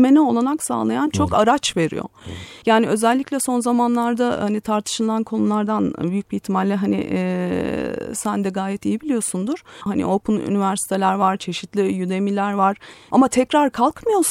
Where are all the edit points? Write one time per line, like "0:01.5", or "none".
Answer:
0:09.9
0:13.1